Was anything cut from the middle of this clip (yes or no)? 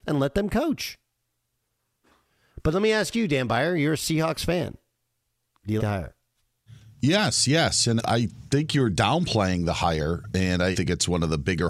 yes